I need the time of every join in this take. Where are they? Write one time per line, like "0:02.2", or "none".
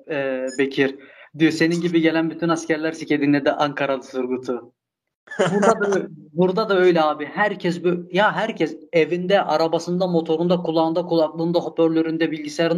0:02.9